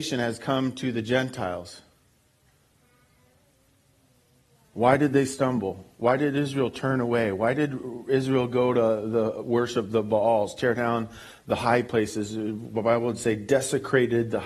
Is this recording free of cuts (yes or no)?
yes